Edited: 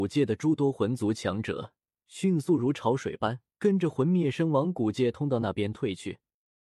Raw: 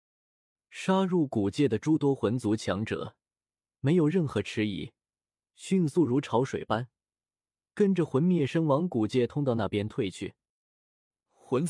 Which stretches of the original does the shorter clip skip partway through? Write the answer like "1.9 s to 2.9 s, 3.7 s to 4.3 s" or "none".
3.4 s to 5.5 s, 7.0 s to 7.7 s

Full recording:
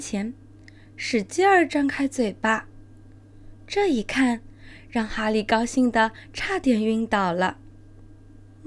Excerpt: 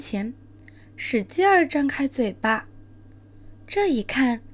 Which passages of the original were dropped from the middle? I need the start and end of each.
none

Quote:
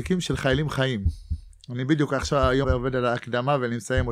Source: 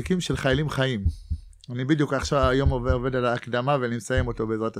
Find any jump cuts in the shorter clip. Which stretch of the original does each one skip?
2.6 s to 2.8 s

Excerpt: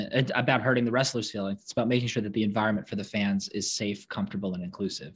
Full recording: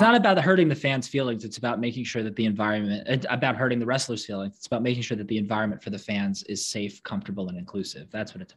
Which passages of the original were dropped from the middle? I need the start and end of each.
none

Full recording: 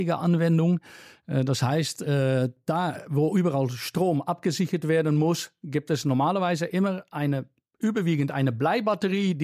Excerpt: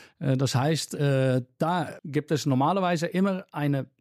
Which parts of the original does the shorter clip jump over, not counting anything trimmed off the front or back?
3.1 s to 5.6 s

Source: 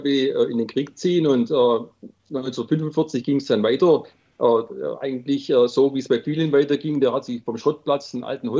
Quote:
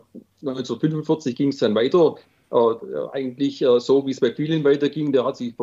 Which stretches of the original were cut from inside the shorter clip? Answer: none

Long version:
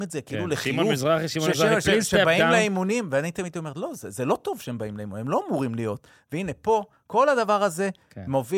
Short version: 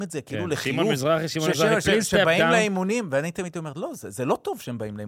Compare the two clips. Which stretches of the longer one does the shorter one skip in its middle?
none

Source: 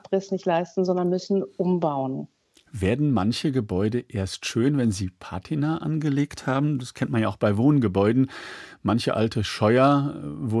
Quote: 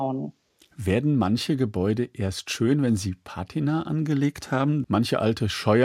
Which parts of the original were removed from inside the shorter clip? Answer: 6.8 s to 8.8 s

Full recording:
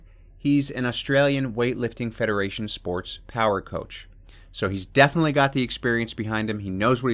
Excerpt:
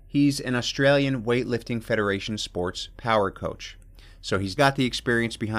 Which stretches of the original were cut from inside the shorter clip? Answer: 4.9 s to 5.3 s

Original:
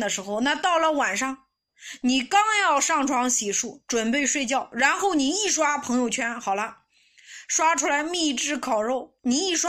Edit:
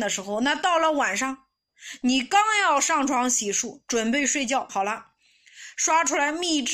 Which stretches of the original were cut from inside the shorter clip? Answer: 4.7 s to 6.4 s

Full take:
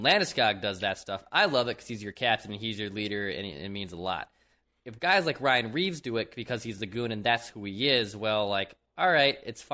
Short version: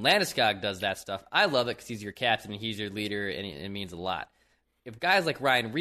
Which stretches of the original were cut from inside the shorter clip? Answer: none

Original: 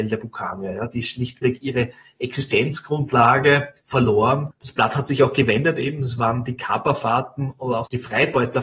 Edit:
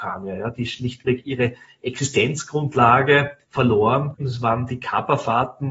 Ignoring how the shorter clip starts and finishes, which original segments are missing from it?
4.6 s to 6.0 s

